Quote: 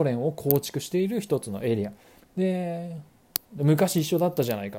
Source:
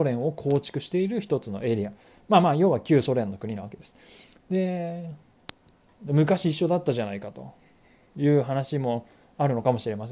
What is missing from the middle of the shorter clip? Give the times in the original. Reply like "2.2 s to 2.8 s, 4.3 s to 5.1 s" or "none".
2.2 s to 4.3 s, 5.6 s to 5.9 s